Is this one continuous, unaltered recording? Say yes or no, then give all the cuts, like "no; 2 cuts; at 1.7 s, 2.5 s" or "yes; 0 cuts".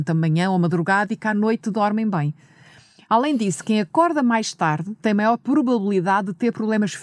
yes; 0 cuts